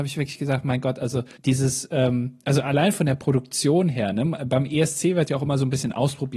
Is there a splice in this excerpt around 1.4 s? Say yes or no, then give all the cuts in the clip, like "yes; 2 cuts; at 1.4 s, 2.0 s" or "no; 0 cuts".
yes; 1 cut; at 1.4 s